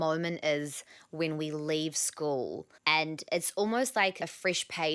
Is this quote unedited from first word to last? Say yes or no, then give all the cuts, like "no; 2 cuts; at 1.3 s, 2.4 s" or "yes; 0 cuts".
no; 1 cut; at 2.8 s